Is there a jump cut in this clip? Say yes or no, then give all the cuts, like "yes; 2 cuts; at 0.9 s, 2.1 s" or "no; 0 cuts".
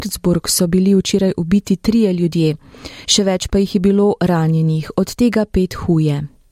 no; 0 cuts